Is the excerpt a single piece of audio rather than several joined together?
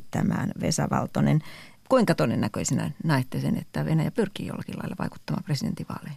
yes; 0 cuts

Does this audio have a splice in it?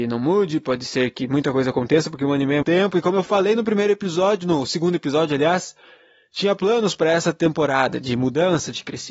yes; 1 cut; at 2.6 s

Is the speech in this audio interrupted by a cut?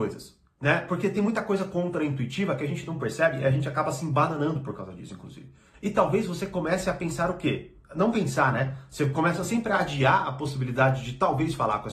yes; 1 cut; at 5.7 s

